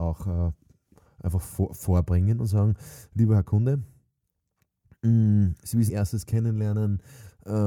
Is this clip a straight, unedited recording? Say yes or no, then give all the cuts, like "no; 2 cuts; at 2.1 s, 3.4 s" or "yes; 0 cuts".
no; 1 cut; at 5.9 s